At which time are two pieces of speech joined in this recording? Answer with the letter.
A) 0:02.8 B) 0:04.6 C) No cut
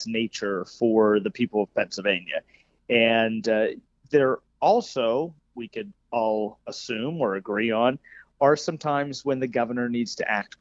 C